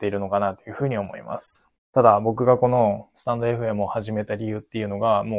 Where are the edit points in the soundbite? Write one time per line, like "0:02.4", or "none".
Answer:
0:01.7